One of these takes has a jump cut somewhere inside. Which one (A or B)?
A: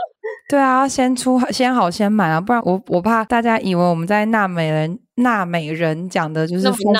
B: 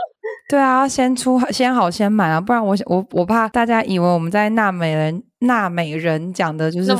A